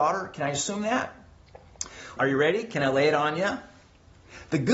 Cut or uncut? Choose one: cut